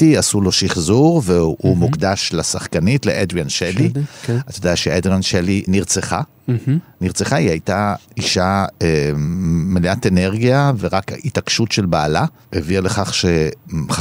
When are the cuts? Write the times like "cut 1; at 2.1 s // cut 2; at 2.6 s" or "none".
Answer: cut 1; at 5.7 s // cut 2; at 10.8 s